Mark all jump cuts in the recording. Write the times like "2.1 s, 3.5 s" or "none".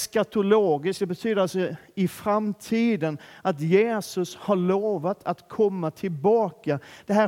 none